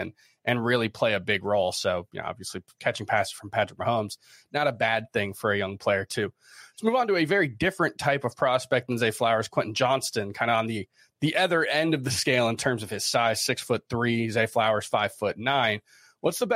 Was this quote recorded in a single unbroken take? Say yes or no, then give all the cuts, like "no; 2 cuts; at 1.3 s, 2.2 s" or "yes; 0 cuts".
yes; 0 cuts